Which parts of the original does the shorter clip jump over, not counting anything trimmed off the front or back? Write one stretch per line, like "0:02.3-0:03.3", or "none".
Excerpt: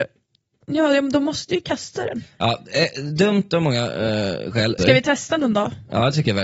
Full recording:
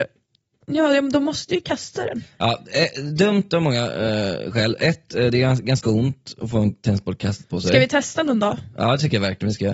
0:04.8-0:07.6